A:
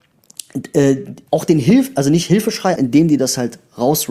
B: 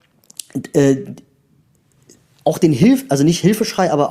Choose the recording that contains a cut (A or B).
A